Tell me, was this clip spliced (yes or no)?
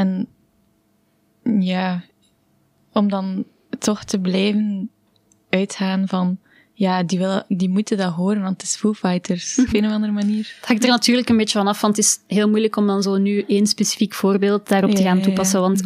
yes